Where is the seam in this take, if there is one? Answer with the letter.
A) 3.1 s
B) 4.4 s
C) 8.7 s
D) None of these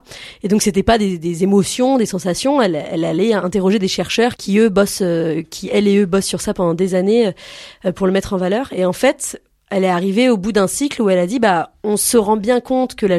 B